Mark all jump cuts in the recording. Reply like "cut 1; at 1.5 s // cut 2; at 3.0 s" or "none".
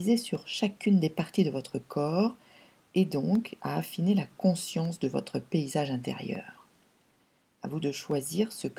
cut 1; at 7.8 s